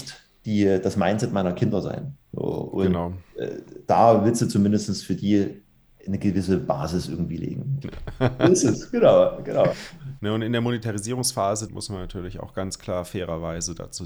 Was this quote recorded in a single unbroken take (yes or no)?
no